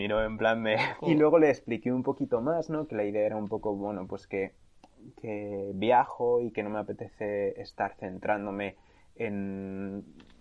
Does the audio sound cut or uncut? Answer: cut